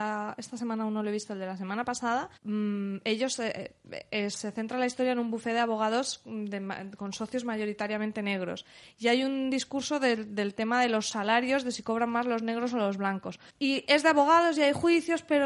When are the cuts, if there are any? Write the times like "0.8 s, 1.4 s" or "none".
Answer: 2.4 s, 13.5 s